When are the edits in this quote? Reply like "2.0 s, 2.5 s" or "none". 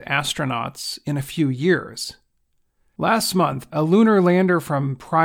3.7 s